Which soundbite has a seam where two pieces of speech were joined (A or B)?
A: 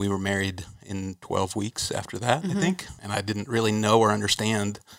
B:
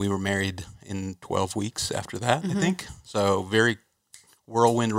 A